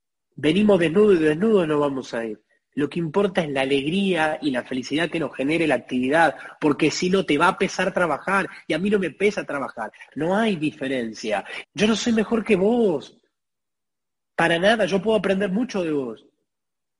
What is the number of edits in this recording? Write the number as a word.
two